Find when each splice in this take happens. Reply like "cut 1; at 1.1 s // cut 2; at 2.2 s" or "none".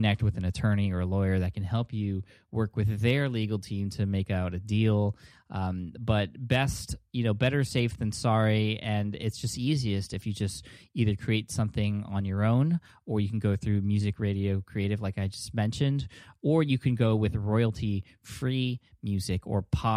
none